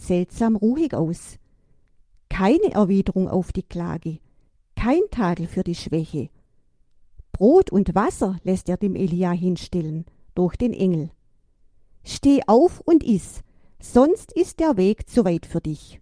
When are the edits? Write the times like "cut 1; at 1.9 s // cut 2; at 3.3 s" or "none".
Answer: none